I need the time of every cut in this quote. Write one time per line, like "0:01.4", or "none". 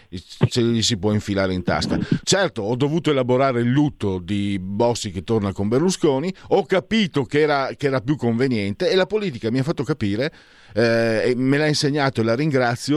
0:02.2